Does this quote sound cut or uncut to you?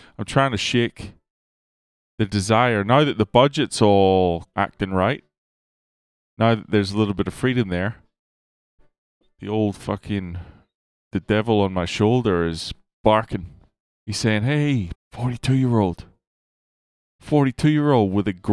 cut